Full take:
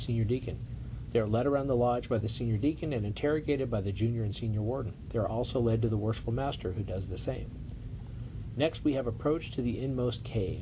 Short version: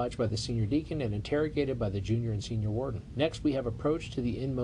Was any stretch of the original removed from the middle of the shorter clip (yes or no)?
yes